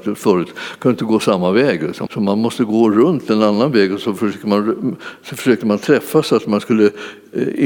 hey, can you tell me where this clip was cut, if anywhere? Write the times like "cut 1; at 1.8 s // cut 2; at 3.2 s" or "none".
cut 1; at 2.1 s